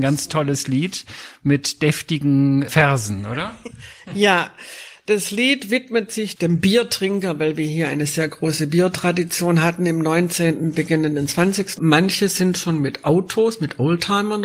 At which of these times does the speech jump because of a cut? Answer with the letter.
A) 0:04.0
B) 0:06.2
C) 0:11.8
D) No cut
C